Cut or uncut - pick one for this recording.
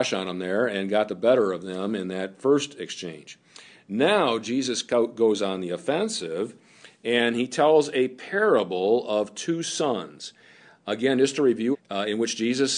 cut